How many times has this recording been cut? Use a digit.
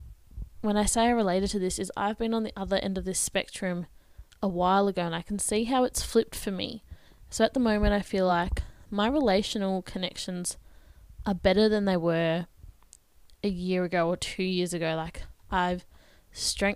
0